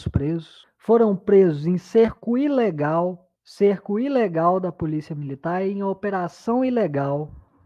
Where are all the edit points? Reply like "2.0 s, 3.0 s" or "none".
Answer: none